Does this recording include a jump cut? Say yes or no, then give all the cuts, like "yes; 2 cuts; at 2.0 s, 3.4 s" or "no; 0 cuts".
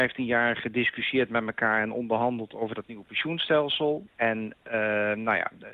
yes; 1 cut; at 4.1 s